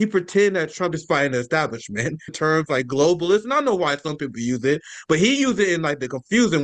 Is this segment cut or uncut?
cut